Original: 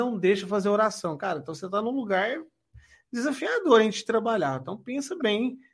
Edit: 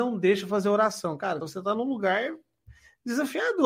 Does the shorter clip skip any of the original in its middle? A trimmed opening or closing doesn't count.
yes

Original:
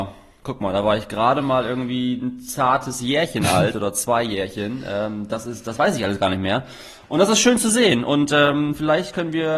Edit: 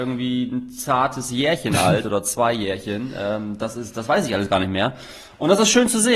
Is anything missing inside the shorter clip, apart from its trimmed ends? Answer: no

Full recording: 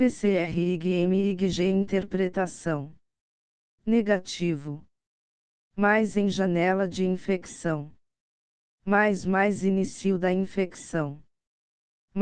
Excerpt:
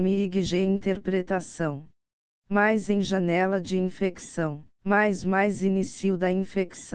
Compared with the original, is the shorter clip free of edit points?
no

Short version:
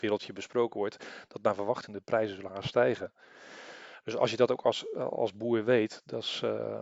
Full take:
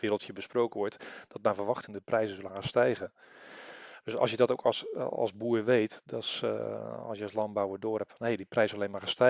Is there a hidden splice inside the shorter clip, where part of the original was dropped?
no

